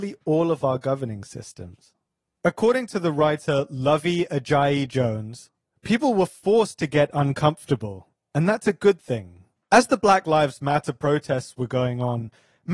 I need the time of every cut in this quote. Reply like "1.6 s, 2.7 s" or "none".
9.6 s